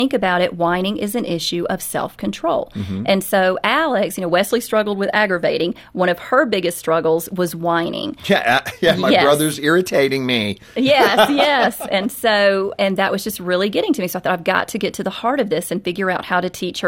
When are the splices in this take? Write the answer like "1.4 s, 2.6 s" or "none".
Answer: none

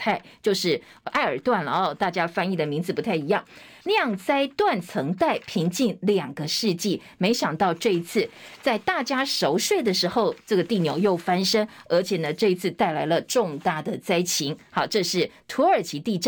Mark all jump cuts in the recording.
3.8 s

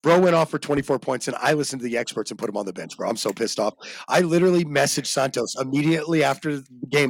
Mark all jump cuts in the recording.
none

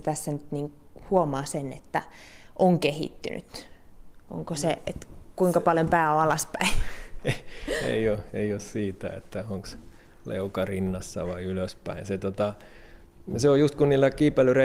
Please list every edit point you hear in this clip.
none

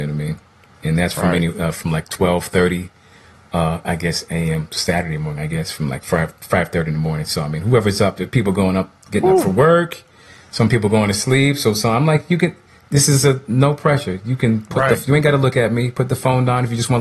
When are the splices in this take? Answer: none

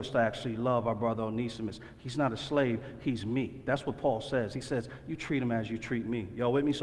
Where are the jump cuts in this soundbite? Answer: none

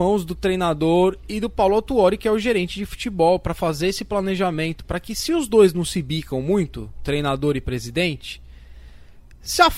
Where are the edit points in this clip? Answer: 4.8 s

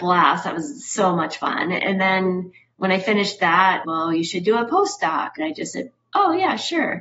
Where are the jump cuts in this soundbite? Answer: 3.8 s, 5.4 s

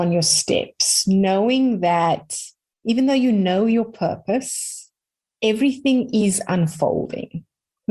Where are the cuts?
none

